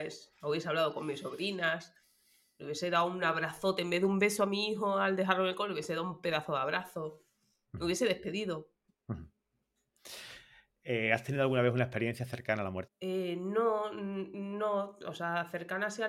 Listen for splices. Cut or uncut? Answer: cut